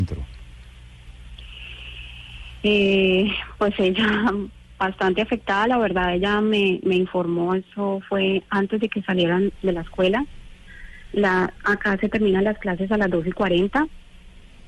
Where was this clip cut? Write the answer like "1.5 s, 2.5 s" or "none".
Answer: none